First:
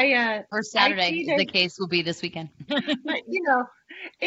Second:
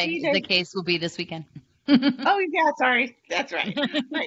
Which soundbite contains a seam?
first; 1 cut; at 2.7 s

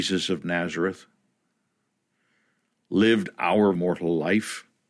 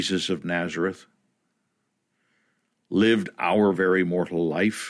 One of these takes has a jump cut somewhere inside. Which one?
first; 1 cut; at 3.8 s

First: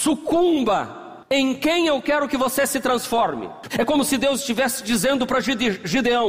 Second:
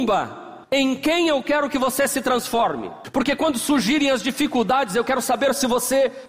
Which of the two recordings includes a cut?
first; 1 cut; at 3.7 s

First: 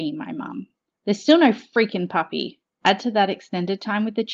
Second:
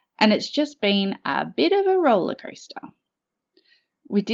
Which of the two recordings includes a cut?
first; 2 cuts; at 1.0 s, 2.6 s

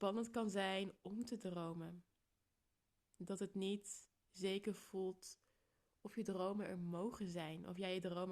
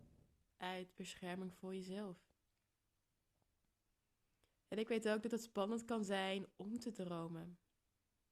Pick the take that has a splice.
second; 1 cut; at 4.5 s

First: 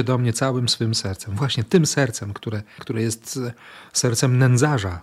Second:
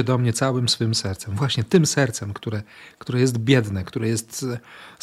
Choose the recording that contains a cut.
first; 1 cut; at 2.8 s

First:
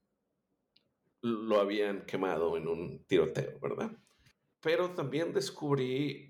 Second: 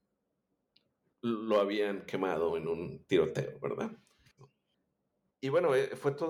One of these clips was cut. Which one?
second; 1 cut; at 4.4 s

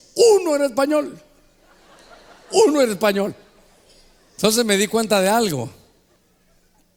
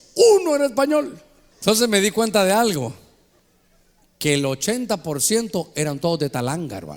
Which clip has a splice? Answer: second; 1 cut; at 1.5 s

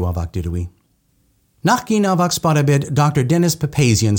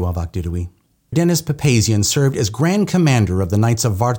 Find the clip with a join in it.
second; 1 cut; at 1.1 s

